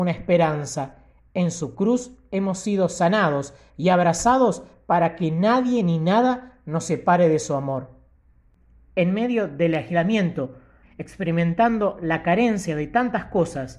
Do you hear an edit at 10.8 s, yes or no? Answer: yes